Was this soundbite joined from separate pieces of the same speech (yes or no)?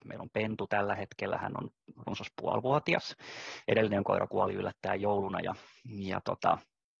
no